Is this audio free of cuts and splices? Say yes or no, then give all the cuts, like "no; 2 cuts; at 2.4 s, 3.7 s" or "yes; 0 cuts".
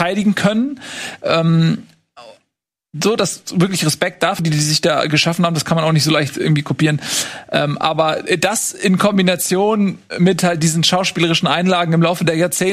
no; 1 cut; at 4.4 s